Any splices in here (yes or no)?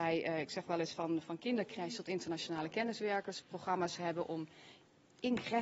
no